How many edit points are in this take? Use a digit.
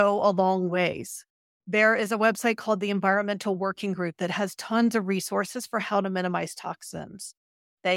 0